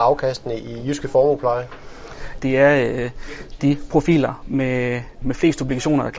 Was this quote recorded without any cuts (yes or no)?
no